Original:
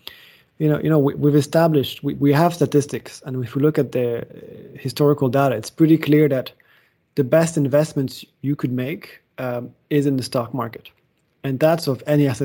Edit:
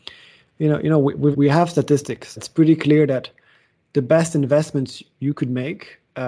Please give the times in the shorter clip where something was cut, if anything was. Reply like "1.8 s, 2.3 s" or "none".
1.3 s, 2.4 s